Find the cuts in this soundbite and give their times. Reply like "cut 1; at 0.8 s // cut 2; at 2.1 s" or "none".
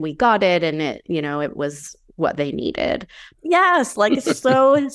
cut 1; at 3.3 s